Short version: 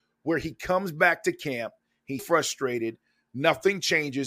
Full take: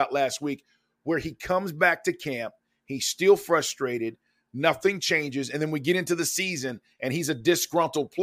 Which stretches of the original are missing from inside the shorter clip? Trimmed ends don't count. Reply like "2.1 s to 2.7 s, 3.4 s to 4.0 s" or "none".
3.0 s to 3.4 s